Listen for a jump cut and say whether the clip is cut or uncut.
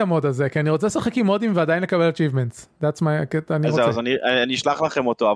uncut